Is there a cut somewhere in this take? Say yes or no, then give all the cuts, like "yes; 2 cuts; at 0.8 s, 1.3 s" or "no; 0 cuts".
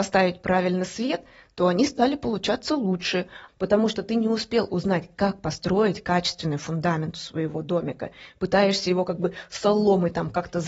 yes; 1 cut; at 3.5 s